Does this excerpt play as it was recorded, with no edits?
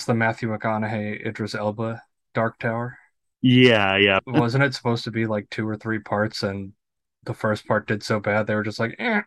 no; 1 cut; at 4.2 s

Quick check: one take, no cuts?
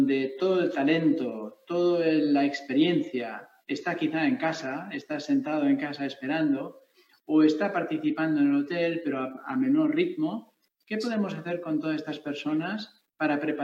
yes; 0 cuts

